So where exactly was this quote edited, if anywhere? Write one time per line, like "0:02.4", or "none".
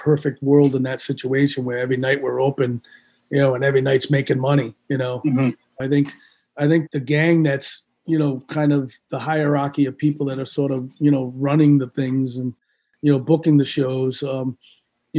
0:05.8
0:06.9

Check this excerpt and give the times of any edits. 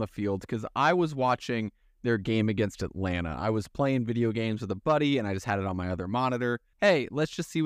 0:06.7

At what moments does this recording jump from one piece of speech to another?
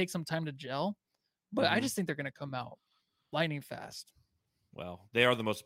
none

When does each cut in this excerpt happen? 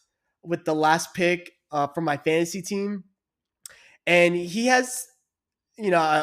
none

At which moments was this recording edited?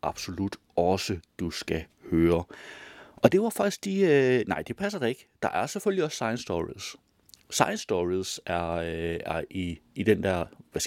none

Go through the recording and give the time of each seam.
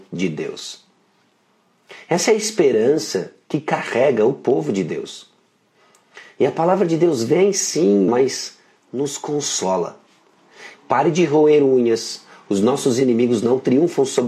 0:08.1
0:10.7

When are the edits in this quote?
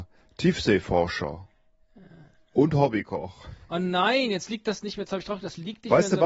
none

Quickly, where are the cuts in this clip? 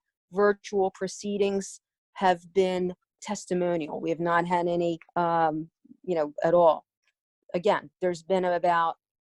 0:03.2
0:05.1
0:06.4

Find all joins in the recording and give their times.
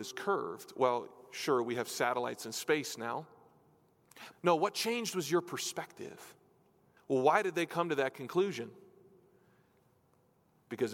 0:04.3
0:07.0

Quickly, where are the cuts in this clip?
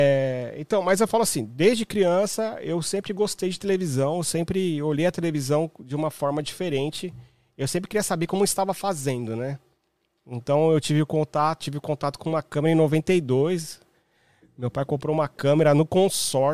0:11.6

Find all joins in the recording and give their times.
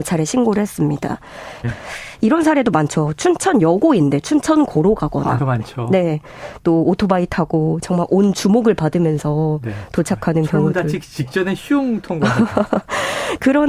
0:01.6
0:05.4

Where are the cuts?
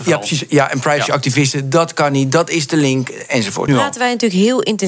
0:03.7

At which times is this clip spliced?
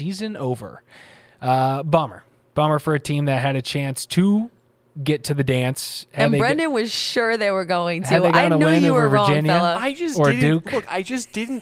none

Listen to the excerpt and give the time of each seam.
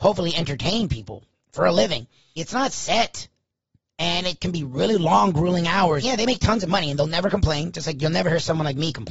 0:02.4
0:06.0

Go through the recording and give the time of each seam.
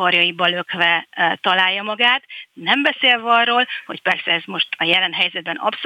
none

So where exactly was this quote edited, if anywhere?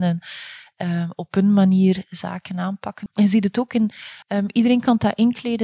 0:03.1
0:04.2

